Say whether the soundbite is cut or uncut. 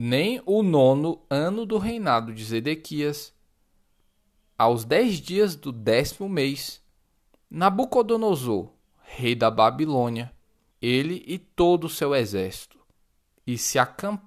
cut